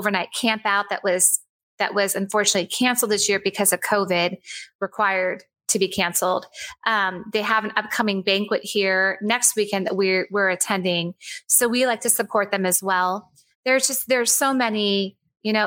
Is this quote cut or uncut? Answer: cut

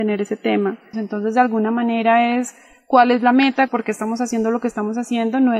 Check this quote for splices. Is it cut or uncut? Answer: cut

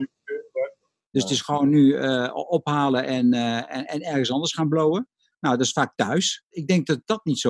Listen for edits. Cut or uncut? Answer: cut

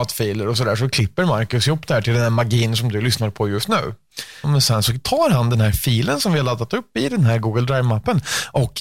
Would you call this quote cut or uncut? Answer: cut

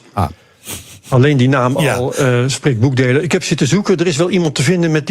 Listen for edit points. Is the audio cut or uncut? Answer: uncut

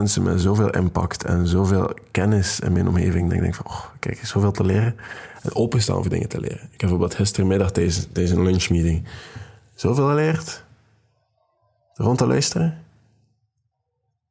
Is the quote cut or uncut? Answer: uncut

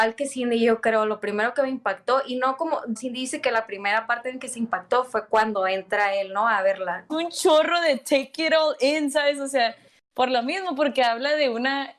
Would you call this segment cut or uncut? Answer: cut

